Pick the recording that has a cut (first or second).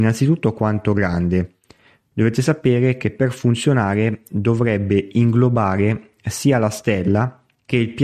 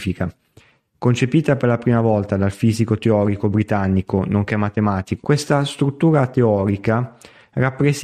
second